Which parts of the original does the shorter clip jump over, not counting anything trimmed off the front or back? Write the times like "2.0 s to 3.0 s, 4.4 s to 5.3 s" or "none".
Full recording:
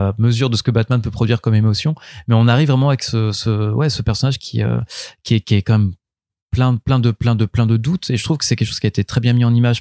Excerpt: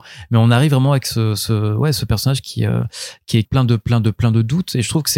5.4 s to 6.8 s

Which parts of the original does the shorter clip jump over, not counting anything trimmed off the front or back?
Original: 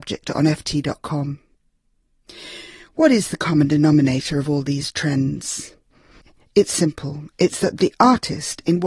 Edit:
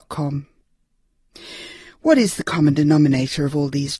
none

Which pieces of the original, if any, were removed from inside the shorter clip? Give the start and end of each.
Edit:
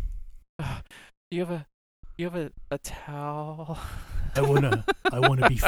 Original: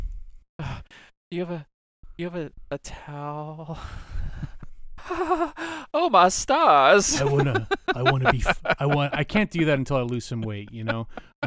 4.4 s to 7.2 s

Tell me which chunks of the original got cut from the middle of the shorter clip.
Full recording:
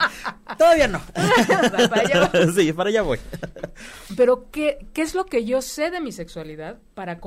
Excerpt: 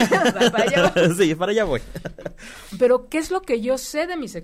4.5 s to 4.9 s

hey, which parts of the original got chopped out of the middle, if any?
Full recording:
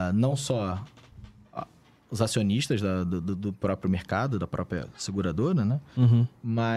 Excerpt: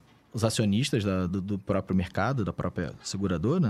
3.0 s to 3.2 s

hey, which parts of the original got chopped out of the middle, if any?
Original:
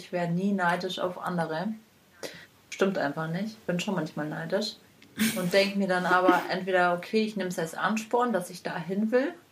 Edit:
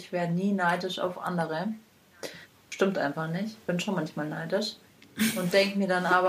none

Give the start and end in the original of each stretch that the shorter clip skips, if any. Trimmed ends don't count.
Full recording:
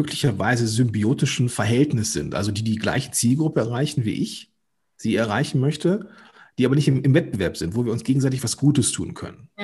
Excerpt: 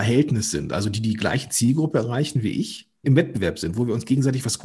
4.7 s to 7.0 s

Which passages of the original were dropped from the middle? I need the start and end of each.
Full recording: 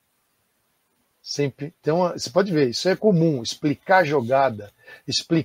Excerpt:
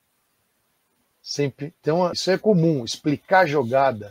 2.1 s to 2.7 s

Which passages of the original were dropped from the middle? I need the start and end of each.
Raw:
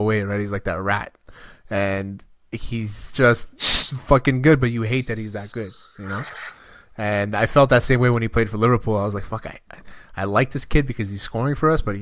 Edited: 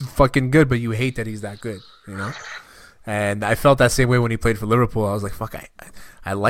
none

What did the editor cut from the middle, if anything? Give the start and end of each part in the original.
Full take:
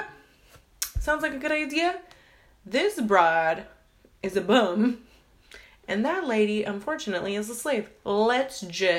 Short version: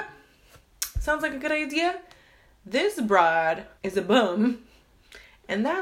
3.8 s to 4.1 s

